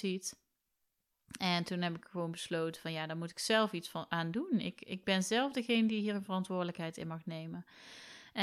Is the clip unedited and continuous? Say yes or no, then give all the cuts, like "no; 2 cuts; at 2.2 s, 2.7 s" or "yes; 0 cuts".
yes; 0 cuts